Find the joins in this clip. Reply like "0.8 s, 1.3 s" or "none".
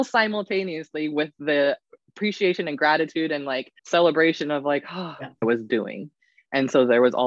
3.8 s, 5.4 s

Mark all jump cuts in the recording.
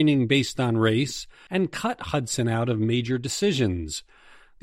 1.5 s

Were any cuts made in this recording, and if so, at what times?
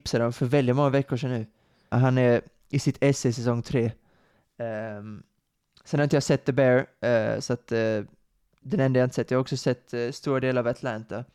1.9 s

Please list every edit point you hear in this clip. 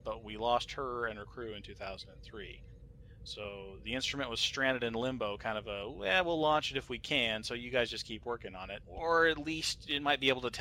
8.8 s

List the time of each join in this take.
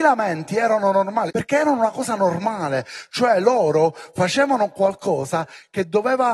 1.3 s

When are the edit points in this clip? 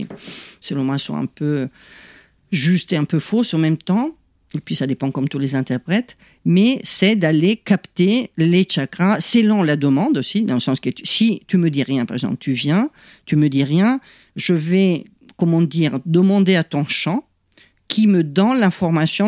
none

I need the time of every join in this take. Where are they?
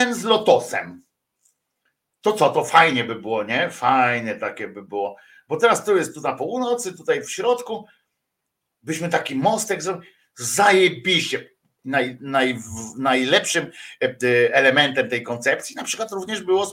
11.8 s

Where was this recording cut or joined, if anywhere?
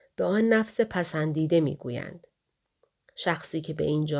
none

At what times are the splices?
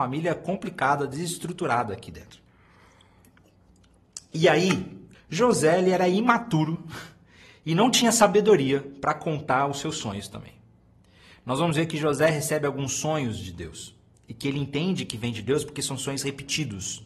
5.1 s

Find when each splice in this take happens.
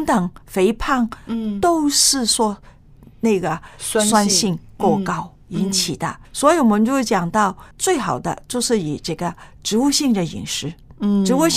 6.2 s, 7.7 s

